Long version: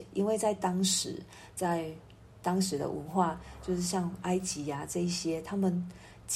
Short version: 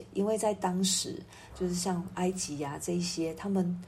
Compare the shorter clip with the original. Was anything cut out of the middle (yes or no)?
yes